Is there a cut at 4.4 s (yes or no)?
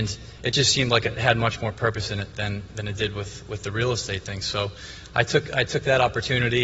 no